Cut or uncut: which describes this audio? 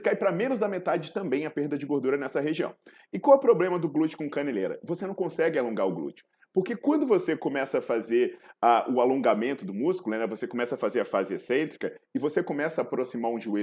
uncut